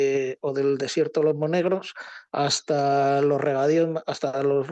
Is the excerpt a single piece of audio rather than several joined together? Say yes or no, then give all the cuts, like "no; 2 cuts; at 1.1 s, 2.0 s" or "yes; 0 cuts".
no; 1 cut; at 2.3 s